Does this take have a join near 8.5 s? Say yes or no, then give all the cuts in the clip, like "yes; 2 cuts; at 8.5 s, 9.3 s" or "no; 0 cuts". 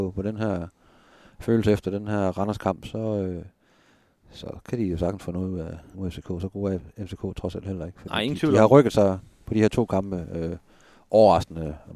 no; 1 cut; at 5.9 s